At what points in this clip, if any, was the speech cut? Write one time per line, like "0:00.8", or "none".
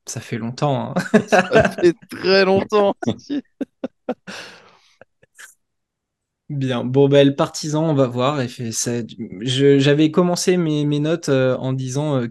none